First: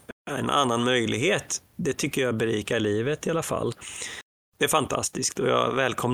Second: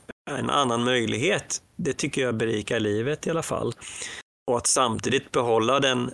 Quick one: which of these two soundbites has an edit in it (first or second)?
first